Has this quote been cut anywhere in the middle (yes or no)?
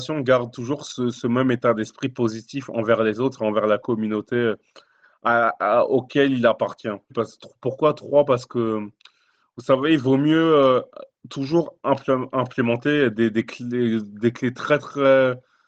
yes